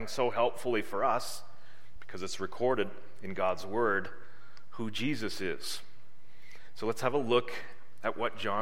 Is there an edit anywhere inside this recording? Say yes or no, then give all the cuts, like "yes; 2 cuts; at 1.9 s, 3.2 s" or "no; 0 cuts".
no; 0 cuts